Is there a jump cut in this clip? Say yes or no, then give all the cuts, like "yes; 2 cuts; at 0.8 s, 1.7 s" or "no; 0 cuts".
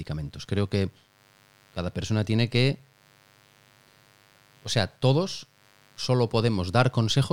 no; 0 cuts